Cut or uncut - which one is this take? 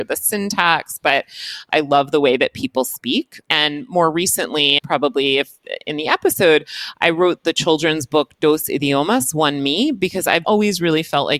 cut